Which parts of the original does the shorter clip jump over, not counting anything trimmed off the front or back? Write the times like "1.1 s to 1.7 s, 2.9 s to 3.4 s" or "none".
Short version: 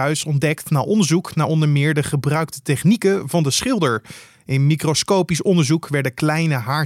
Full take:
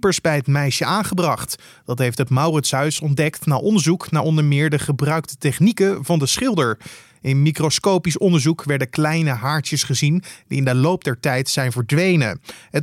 none